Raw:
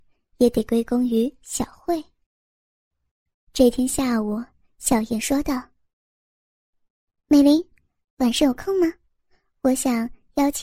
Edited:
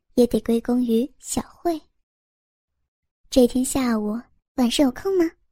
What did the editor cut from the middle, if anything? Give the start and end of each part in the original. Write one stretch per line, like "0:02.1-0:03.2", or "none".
0:04.6-0:08.0